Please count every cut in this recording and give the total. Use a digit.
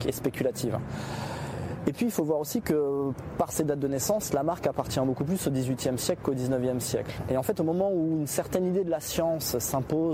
0